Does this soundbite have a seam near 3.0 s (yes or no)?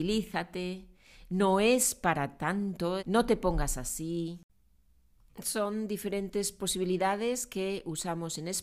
yes